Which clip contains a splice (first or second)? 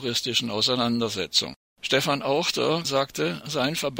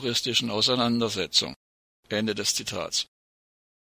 first